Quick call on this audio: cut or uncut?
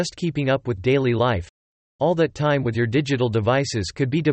uncut